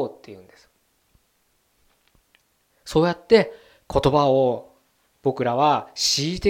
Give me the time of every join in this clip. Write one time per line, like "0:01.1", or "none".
0:02.7